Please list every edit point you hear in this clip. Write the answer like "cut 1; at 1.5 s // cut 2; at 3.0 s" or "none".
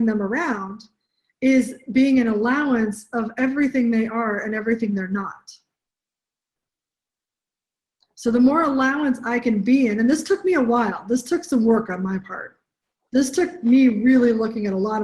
none